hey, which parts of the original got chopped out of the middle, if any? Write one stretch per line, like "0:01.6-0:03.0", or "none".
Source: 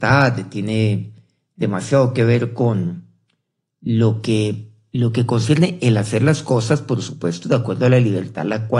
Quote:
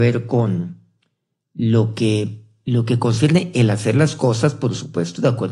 none